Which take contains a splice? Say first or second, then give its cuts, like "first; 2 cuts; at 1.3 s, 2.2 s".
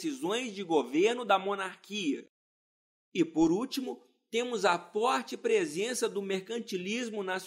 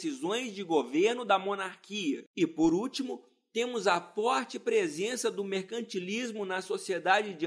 second; 1 cut; at 2.3 s